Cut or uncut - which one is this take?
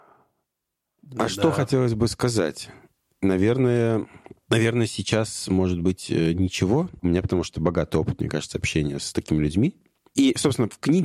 cut